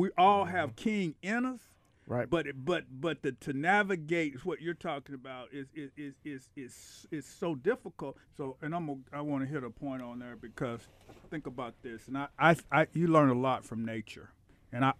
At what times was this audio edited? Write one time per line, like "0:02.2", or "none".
0:08.2

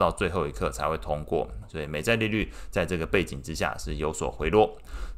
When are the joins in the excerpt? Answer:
0:01.6

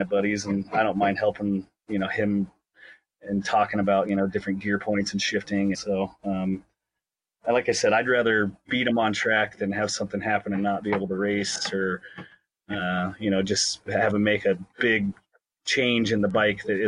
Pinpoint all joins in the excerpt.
0:05.7

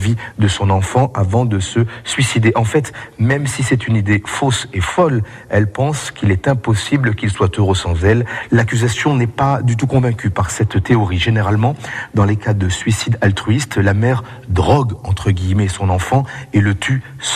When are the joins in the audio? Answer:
0:08.5

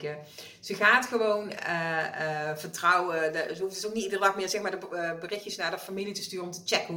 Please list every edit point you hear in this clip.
none

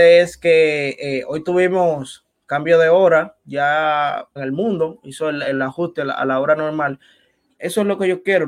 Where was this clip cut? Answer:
0:04.4
0:07.6

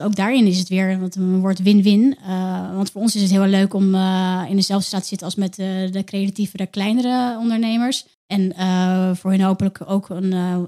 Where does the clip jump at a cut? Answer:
0:08.1

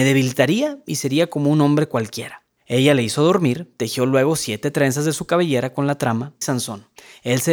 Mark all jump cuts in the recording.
0:06.4

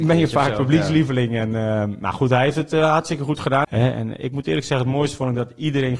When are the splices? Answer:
0:03.6

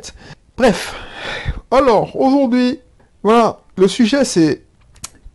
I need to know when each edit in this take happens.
none

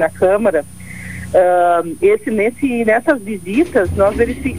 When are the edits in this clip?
none

